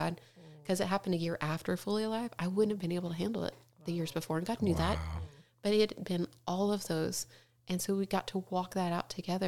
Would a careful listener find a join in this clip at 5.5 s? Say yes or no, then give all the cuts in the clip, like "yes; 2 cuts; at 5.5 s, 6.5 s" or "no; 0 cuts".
no; 0 cuts